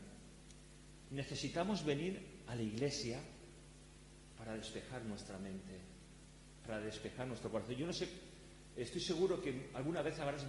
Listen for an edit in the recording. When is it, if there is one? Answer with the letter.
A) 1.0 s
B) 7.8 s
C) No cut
A